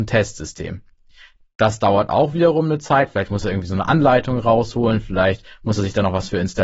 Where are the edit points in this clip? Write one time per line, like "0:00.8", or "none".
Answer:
none